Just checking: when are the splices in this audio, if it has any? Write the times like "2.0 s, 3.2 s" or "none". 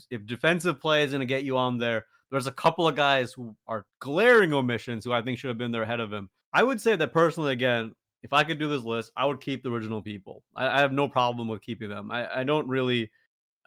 6.4 s